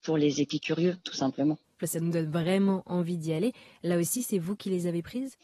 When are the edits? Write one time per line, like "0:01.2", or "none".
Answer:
0:01.8